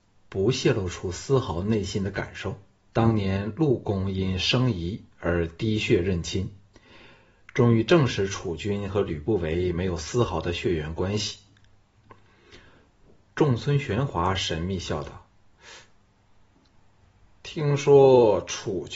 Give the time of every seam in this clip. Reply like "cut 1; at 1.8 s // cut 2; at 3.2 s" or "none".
cut 1; at 2.9 s